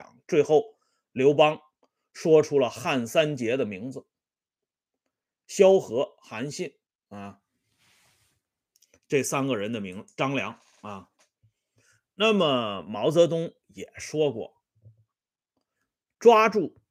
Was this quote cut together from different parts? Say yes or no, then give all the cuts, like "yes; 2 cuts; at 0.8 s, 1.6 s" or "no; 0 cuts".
no; 0 cuts